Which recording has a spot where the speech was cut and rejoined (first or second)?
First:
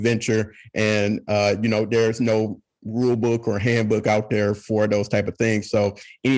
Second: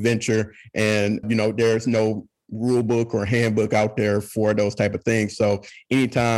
second